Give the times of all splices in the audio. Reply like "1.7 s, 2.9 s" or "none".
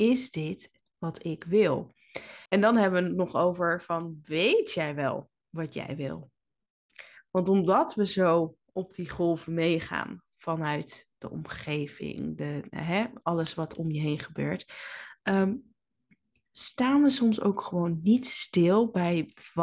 2.5 s